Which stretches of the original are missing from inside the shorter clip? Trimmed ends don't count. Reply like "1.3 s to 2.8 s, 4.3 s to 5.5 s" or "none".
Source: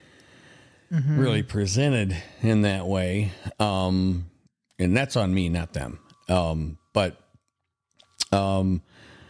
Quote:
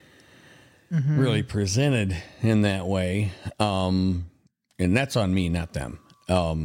none

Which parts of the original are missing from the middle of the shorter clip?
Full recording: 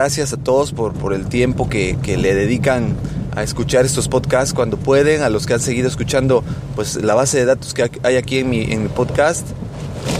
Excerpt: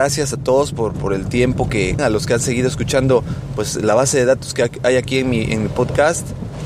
2.0 s to 5.2 s

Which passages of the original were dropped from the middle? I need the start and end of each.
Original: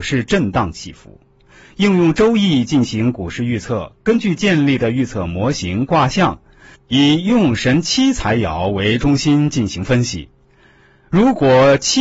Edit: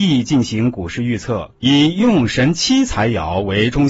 3.9 s to 6.8 s

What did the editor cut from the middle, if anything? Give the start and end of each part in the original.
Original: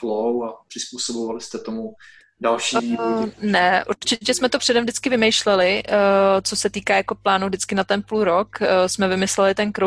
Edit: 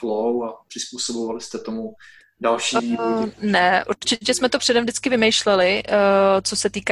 none

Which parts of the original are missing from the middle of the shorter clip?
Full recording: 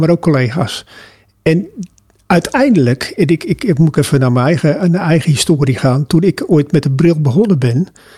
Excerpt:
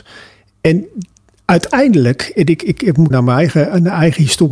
3.9 s to 4.2 s

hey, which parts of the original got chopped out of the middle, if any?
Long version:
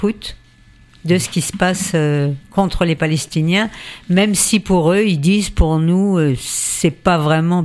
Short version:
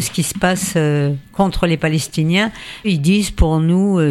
4.0 s to 5.0 s

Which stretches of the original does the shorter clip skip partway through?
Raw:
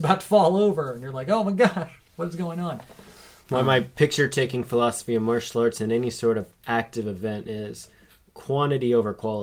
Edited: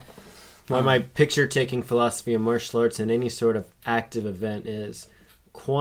none

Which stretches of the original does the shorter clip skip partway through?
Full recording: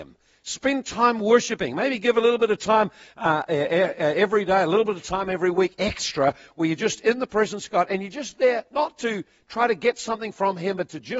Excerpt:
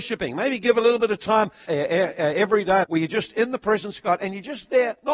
3.0 s to 3.5 s, 4.6 s to 6.5 s

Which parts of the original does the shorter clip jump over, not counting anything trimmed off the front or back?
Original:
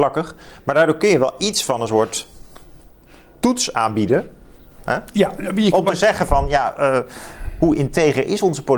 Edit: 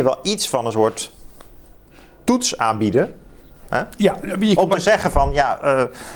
none

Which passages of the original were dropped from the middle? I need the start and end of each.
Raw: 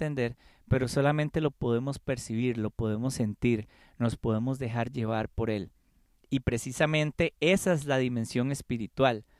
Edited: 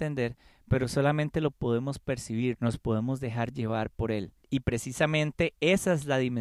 2.5 s to 3.9 s, 5.8 s to 6.2 s

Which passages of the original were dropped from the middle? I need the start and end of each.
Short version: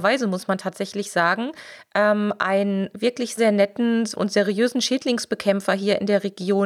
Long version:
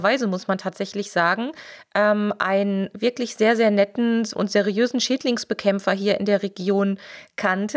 3.4 s to 3.6 s

